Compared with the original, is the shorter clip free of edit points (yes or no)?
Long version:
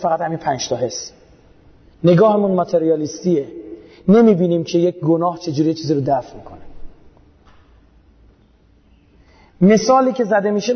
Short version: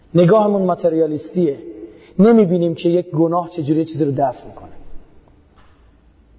yes